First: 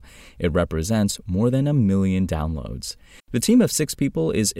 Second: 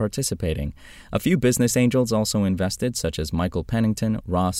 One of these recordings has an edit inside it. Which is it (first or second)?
first